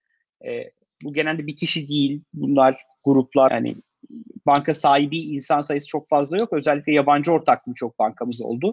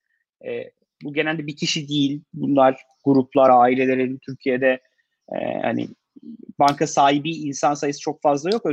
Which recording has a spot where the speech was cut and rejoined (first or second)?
first